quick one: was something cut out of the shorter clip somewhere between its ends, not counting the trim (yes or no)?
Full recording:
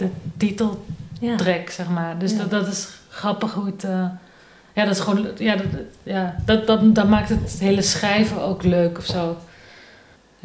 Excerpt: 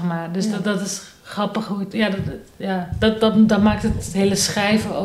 yes